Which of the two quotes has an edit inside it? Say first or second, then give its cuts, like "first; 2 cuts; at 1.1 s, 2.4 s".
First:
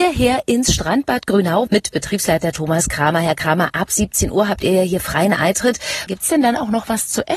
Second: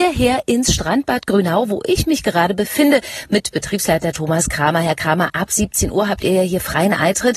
first; 2 cuts; at 1.7 s, 6.1 s